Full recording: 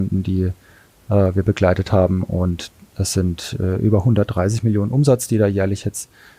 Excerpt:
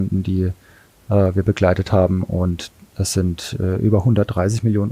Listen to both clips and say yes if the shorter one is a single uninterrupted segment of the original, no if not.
yes